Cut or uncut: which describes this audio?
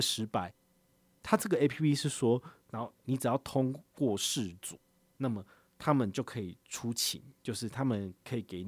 cut